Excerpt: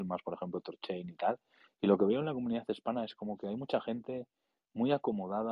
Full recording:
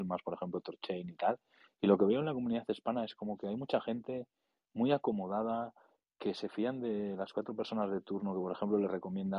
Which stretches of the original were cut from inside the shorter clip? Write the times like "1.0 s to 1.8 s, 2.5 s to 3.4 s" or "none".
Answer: none